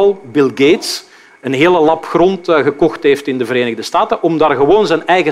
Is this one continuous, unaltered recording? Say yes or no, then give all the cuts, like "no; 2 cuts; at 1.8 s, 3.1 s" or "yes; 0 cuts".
yes; 0 cuts